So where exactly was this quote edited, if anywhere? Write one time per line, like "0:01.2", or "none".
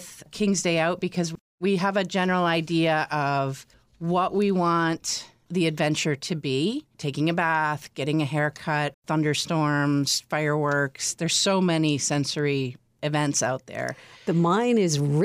0:08.9